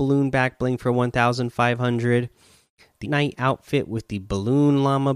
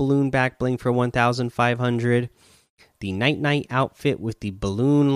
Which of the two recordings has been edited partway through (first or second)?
first